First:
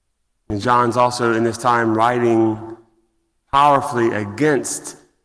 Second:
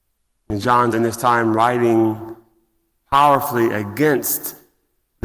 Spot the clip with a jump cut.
second; 1 cut; at 0.9 s

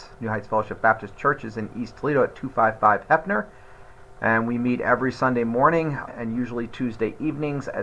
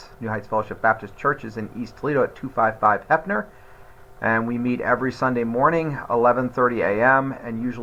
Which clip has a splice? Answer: first; 1 cut; at 6.1 s

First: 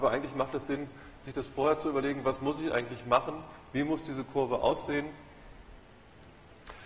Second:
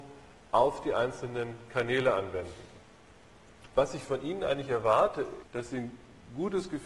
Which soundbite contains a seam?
second; 2 cuts; at 3.7 s, 5.4 s

